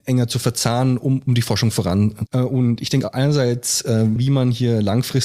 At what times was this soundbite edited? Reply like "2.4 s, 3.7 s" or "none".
2.3 s, 4.2 s